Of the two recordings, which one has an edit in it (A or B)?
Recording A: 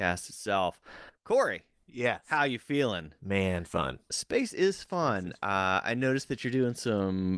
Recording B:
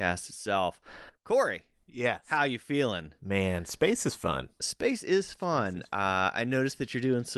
A